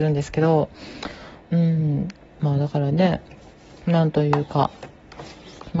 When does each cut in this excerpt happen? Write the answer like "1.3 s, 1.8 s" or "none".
none